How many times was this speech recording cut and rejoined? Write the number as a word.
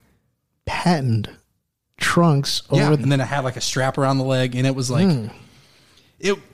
one